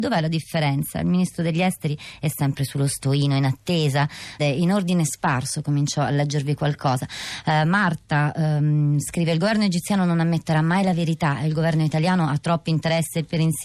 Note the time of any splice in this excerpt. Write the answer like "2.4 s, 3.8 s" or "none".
4.4 s